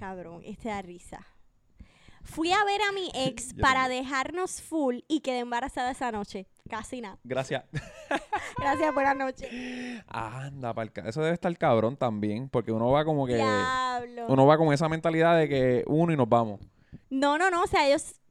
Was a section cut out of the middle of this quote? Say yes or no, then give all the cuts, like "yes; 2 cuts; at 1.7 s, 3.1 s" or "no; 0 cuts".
yes; 1 cut; at 17.0 s